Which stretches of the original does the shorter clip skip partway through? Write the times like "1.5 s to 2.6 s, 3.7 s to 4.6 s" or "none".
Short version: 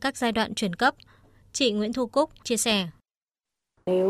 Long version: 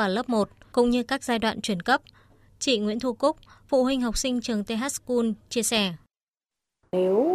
3.5 s to 5.5 s

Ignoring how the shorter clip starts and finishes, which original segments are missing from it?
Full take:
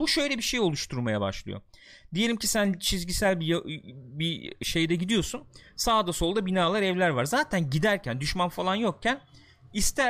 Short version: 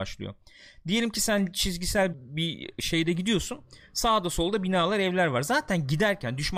3.4 s to 3.9 s

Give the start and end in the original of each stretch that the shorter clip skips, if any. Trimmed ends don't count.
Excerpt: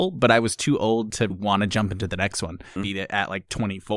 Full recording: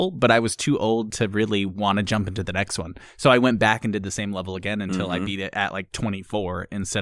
1.3 s to 1.7 s, 3.1 s to 5.2 s

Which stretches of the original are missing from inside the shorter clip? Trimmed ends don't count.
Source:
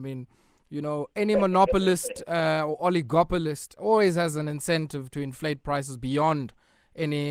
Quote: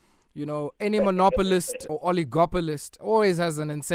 2.3 s to 2.7 s

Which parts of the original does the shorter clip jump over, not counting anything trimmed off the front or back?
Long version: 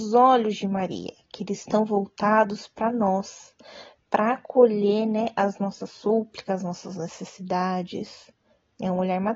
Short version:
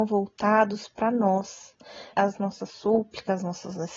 3.9 s to 5.3 s

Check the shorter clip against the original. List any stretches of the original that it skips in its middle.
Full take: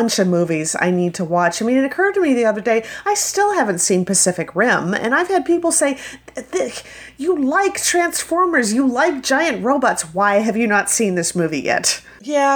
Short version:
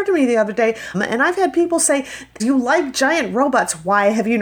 3.0 s to 4.9 s, 6.3 s to 8.7 s

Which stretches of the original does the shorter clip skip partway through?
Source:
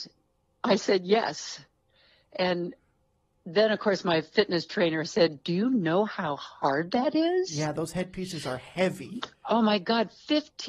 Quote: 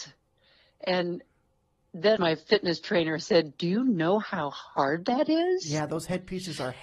3.7 s to 4.0 s

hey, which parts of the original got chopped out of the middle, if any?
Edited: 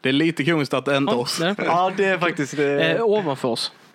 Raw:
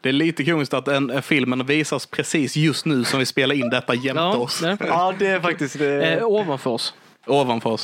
1.1 s to 4.3 s

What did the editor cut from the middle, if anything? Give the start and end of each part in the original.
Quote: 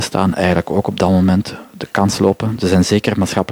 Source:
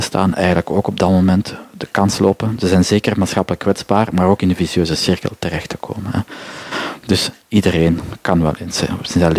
none

